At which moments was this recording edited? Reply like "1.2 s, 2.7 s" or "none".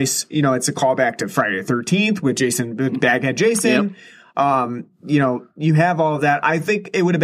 none